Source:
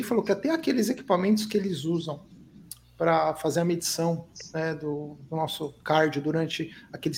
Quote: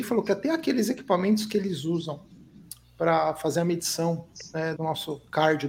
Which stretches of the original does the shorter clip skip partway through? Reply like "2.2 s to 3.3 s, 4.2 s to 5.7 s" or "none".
4.8 s to 5.3 s